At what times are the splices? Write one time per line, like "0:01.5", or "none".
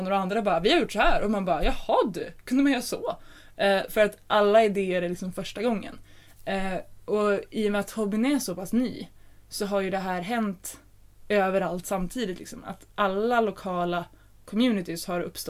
none